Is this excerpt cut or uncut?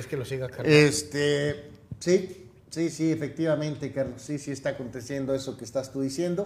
cut